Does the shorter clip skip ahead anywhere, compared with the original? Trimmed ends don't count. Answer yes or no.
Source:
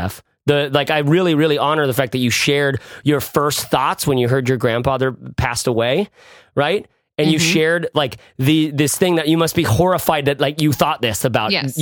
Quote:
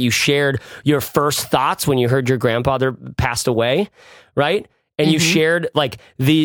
no